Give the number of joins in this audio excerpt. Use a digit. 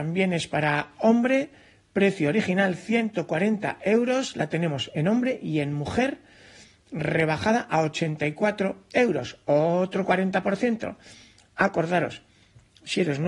1